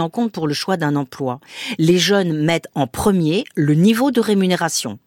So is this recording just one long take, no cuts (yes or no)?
yes